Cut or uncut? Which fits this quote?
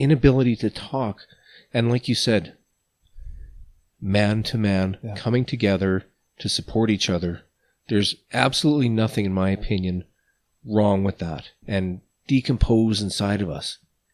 cut